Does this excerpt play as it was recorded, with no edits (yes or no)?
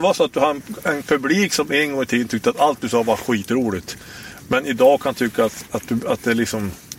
yes